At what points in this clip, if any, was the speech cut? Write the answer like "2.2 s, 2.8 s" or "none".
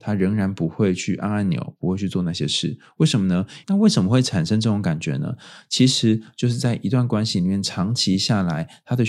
3.6 s